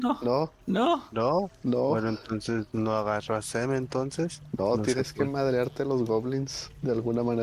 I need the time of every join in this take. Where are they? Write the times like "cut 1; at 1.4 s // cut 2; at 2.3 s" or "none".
none